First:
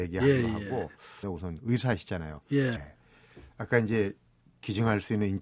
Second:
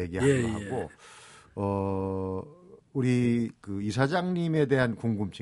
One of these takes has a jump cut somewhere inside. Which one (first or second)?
first